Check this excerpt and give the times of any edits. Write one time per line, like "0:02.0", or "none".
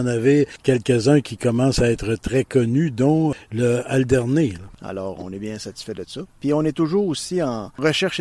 0:04.7